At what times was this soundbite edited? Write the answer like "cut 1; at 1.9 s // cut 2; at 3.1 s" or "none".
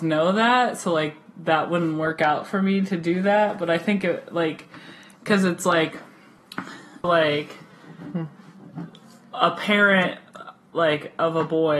cut 1; at 7.0 s